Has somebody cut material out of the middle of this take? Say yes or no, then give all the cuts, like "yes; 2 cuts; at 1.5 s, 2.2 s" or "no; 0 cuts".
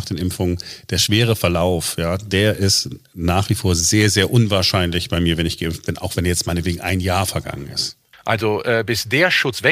yes; 1 cut; at 8.1 s